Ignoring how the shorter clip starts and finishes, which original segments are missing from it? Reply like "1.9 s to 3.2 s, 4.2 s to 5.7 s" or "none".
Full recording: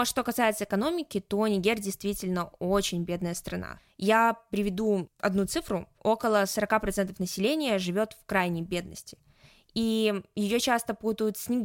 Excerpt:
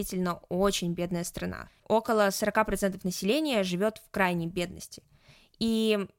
3.9 s to 5.9 s